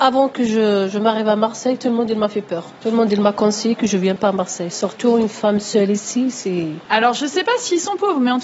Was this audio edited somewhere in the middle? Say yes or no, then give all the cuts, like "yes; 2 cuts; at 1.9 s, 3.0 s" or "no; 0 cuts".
yes; 1 cut; at 6.9 s